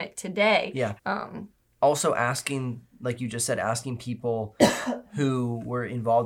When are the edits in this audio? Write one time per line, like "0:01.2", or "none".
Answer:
0:01.0

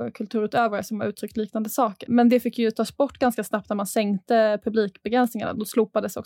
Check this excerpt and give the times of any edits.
0:02.1

